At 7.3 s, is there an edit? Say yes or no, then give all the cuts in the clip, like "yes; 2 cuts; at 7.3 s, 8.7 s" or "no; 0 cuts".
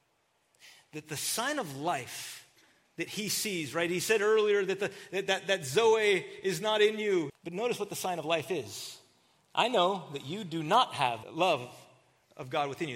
yes; 2 cuts; at 7.3 s, 11.2 s